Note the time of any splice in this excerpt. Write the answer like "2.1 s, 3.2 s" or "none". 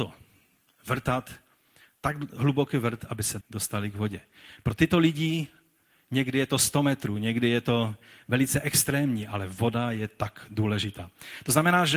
3.4 s